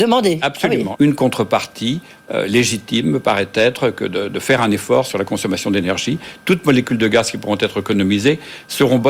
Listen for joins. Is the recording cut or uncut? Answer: cut